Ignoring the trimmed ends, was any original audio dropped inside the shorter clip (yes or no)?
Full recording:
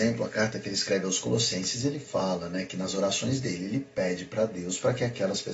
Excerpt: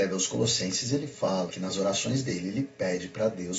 yes